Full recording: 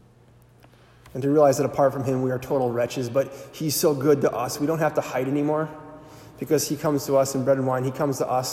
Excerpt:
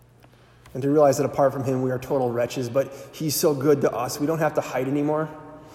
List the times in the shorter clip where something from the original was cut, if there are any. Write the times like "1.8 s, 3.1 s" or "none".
none